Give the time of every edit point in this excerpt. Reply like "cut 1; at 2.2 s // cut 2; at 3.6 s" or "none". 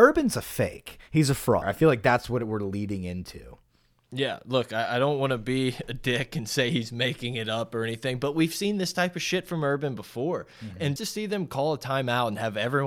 cut 1; at 1.6 s // cut 2; at 11.0 s